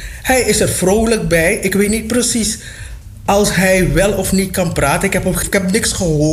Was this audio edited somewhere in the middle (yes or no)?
yes